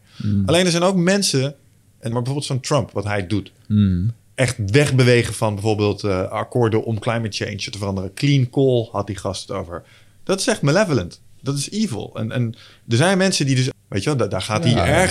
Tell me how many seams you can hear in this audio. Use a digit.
2